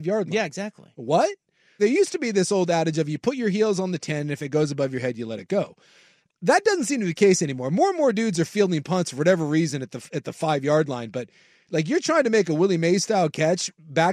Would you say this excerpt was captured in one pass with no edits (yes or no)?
no